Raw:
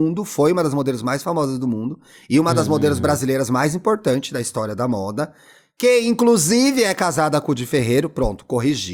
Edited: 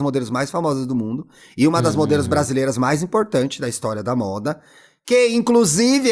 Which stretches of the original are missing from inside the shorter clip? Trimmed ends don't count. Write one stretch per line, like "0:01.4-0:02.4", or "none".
none